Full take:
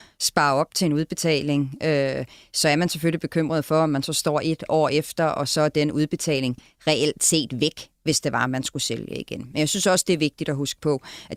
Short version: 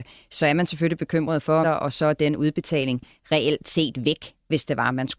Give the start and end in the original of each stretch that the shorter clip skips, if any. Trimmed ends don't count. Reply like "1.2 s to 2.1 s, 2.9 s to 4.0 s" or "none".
3.8 s to 5.2 s